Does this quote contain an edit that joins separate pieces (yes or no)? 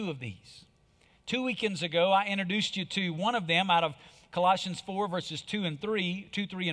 no